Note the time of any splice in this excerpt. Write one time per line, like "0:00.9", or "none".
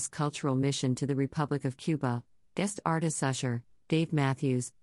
0:02.4
0:03.8